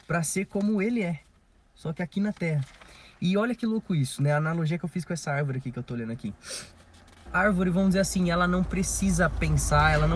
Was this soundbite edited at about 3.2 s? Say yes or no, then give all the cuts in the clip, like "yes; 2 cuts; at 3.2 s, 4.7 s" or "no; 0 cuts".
no; 1 cut; at 7.3 s